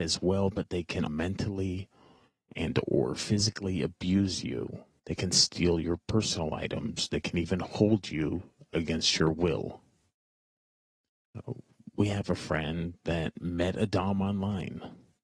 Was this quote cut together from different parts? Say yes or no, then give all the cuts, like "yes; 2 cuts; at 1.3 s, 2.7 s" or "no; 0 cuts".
yes; 2 cuts; at 1.1 s, 5.0 s